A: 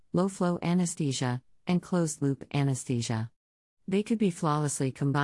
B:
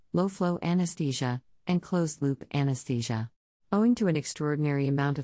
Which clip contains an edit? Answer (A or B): B